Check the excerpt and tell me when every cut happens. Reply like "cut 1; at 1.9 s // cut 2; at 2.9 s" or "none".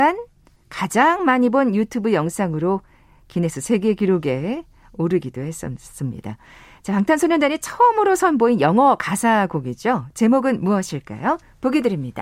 none